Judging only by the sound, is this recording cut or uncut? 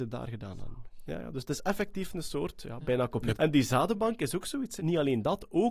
cut